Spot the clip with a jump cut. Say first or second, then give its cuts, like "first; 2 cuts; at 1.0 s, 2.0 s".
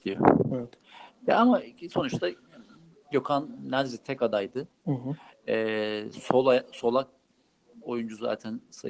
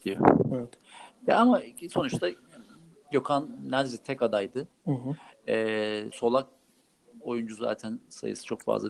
second; 1 cut; at 6.1 s